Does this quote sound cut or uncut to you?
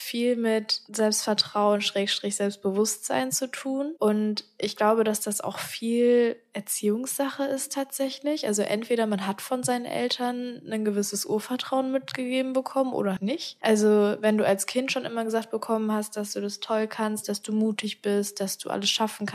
cut